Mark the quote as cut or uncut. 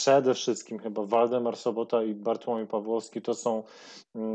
uncut